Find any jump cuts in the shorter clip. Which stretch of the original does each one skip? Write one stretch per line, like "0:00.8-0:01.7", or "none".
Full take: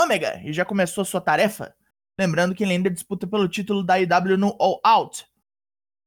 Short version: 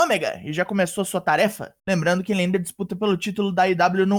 0:01.8-0:02.1